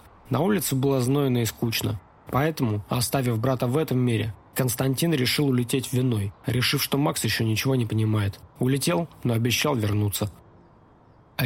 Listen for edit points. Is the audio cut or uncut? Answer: uncut